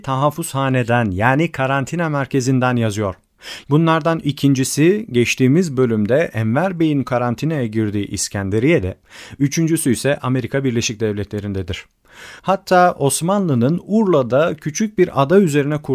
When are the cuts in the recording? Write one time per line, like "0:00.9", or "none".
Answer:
0:03.6
0:12.4